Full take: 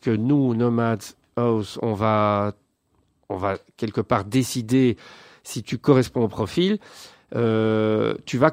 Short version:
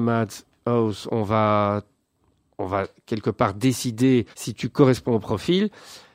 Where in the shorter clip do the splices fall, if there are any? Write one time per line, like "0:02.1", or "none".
0:04.3